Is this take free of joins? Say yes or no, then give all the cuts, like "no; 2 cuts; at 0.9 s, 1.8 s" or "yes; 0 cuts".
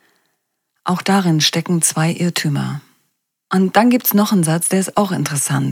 no; 1 cut; at 3.5 s